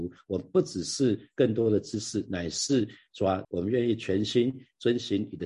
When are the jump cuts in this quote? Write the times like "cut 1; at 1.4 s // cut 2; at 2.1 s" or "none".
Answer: cut 1; at 3.4 s

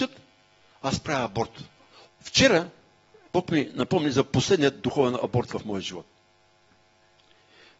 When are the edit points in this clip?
cut 1; at 2.1 s // cut 2; at 3.3 s

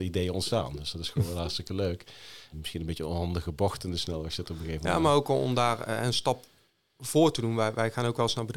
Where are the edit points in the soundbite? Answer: cut 1; at 2.5 s

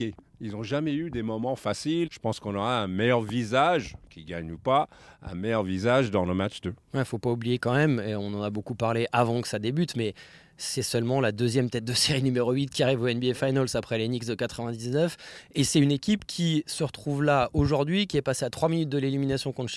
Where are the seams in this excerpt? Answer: cut 1; at 2.1 s

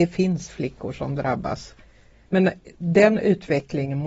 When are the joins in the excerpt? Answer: cut 1; at 2.2 s

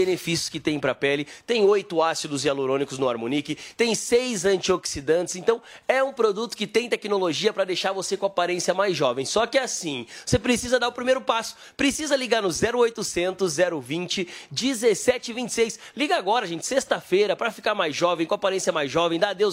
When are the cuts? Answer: none

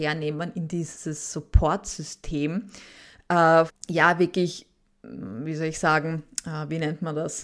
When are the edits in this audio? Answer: cut 1; at 3.7 s

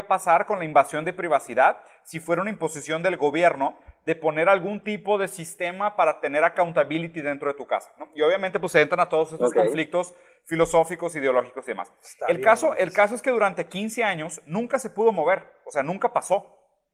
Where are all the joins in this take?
none

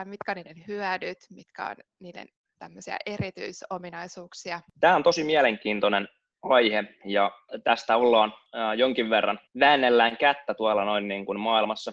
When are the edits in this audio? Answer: none

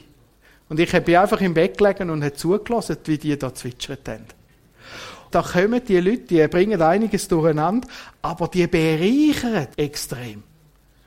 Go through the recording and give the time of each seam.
cut 1; at 5.3 s // cut 2; at 9.7 s

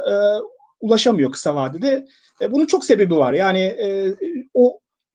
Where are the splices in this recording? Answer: none

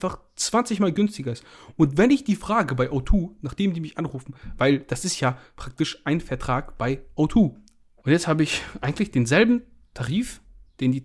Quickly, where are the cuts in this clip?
cut 1; at 4.6 s // cut 2; at 8.0 s

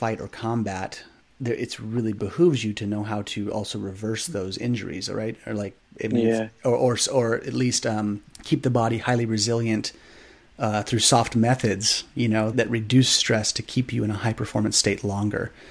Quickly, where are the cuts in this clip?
cut 1; at 8.3 s // cut 2; at 12.5 s

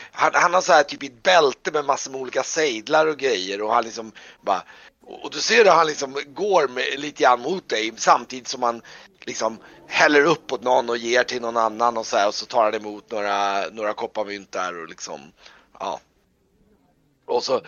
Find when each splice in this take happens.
none

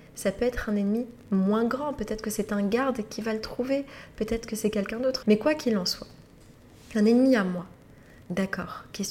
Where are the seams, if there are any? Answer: cut 1; at 5.2 s

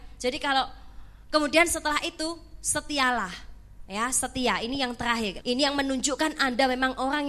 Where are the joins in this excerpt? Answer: cut 1; at 5.4 s

